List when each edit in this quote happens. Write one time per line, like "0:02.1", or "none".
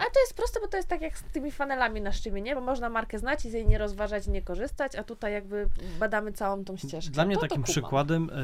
none